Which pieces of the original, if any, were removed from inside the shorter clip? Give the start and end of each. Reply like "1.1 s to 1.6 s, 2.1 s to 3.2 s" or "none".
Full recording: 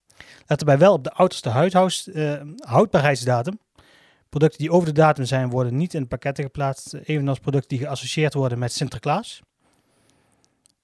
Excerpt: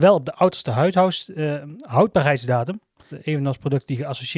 3.9 s to 6.9 s

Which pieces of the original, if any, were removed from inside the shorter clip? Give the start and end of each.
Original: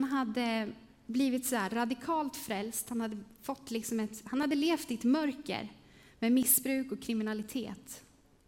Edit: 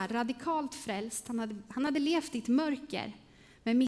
3.3 s to 4.2 s

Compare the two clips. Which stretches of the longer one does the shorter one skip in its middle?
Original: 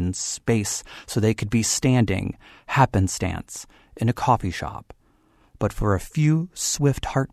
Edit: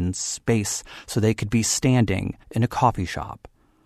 2.4 s to 3.9 s

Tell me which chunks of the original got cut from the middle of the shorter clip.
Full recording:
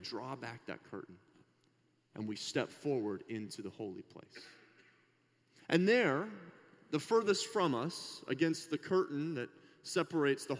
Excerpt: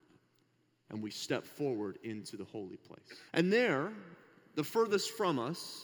4.5 s to 5.6 s

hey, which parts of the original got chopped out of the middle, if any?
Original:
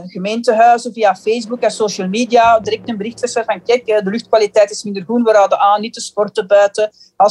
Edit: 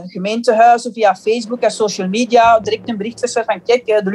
none

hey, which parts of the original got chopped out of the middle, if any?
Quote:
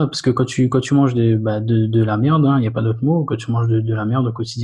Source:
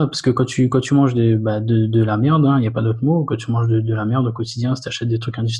none

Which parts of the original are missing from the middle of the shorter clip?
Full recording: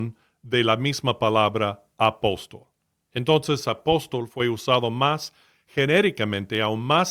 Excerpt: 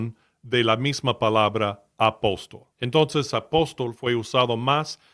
2.7 s to 3.1 s

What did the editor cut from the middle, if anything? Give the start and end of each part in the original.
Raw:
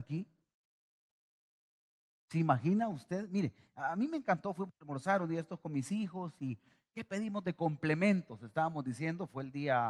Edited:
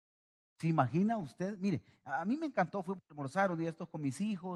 none

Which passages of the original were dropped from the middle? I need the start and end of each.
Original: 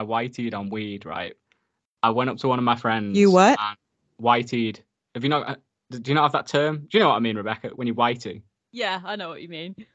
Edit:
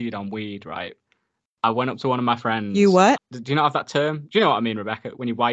3.6 s to 5.8 s

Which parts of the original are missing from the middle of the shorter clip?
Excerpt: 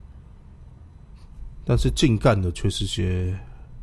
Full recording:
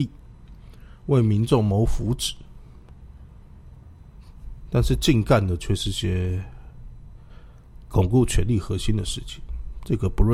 none

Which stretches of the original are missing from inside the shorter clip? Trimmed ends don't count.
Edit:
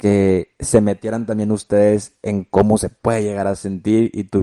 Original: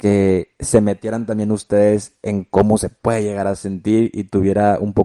none

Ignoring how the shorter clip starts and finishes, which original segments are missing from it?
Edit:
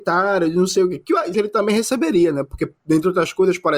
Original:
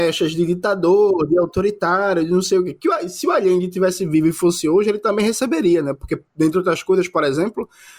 3.1 s to 4.8 s

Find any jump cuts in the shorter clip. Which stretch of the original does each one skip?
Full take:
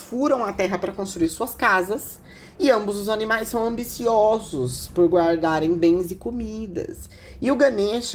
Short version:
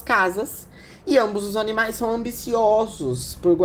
none

